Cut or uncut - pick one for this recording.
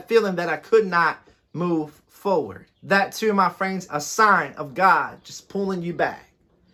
cut